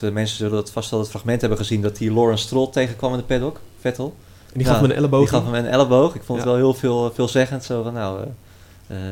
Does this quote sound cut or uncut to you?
uncut